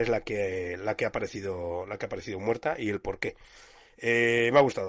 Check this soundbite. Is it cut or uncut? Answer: uncut